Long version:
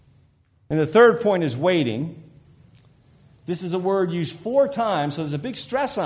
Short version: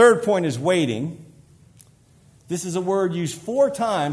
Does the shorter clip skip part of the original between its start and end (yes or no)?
no